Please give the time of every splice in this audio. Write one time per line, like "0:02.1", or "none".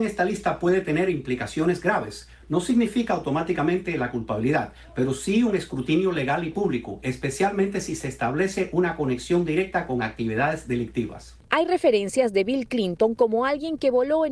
none